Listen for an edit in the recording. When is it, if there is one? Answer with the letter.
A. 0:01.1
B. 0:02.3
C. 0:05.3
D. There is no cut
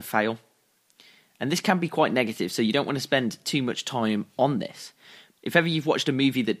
C